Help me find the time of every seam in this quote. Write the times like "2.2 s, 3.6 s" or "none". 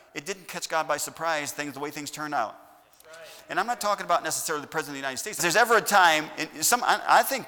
5.4 s